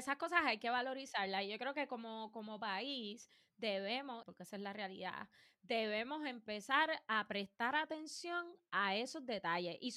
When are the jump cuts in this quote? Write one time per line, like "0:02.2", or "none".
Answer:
0:04.2